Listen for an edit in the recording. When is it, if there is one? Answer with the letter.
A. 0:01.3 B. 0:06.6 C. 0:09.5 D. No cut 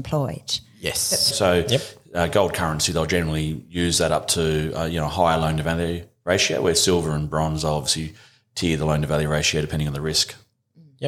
A